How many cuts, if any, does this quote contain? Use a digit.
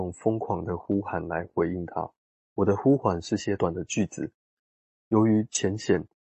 2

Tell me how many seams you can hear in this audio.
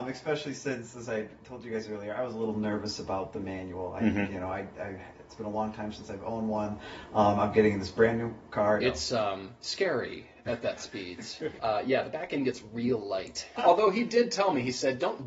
3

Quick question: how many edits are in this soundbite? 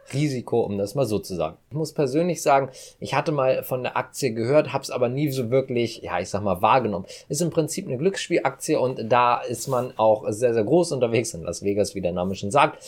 0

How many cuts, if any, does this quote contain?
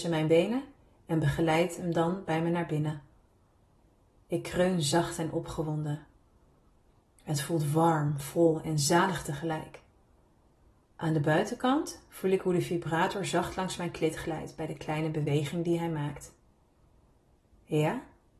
0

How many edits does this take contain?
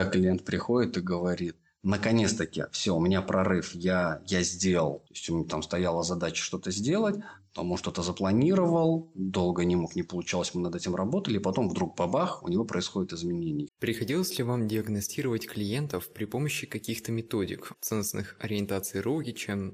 3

